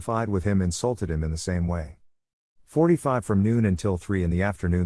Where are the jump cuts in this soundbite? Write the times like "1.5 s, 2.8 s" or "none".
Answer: 2.5 s